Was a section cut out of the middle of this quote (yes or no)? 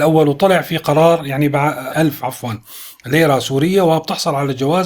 yes